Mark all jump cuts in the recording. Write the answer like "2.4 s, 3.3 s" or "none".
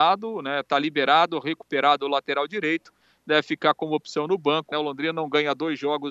4.7 s